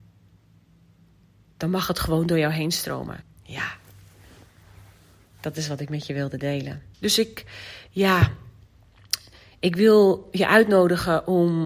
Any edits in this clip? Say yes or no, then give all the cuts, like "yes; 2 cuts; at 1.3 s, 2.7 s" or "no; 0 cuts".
yes; 2 cuts; at 3.2 s, 6.9 s